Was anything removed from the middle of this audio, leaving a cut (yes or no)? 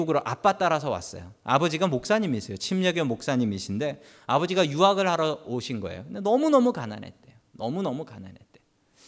no